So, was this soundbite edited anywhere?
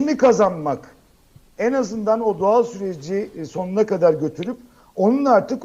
no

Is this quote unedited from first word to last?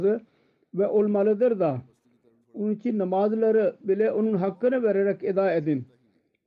no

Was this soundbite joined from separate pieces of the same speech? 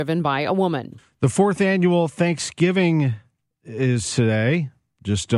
no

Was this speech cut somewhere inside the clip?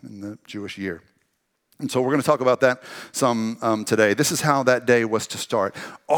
no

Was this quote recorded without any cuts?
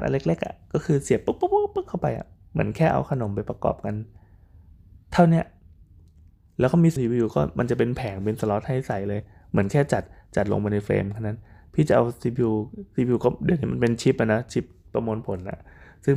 no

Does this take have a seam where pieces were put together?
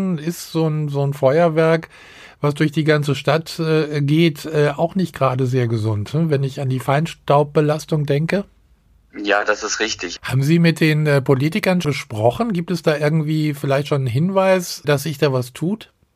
yes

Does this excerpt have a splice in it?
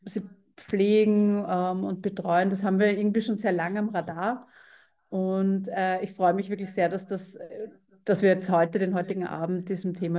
no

